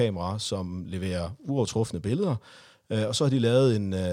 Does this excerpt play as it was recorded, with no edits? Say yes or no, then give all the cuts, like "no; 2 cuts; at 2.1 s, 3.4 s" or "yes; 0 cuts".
yes; 0 cuts